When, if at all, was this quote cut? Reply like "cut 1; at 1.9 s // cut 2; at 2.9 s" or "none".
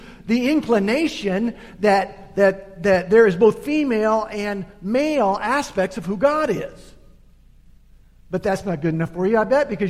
none